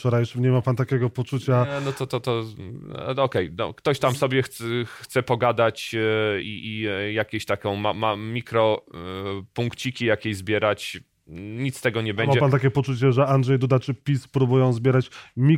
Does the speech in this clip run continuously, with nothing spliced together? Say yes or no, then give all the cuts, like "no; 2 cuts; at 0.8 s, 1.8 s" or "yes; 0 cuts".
yes; 0 cuts